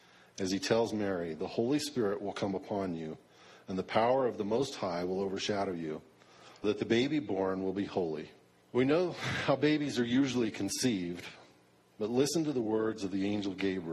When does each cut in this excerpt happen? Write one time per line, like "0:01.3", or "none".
0:06.6
0:08.6